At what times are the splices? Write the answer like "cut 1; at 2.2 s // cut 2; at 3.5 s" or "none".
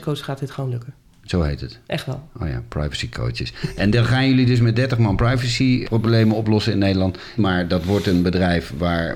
cut 1; at 5.8 s // cut 2; at 7.4 s